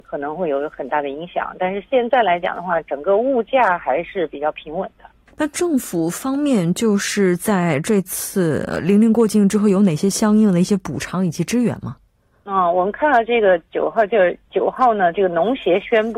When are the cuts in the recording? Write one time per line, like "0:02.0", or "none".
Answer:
0:05.3